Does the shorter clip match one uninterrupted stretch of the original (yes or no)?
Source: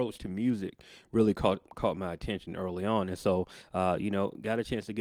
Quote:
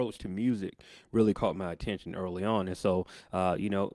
no